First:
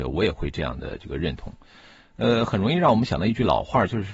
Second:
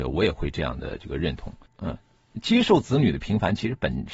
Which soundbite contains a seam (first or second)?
second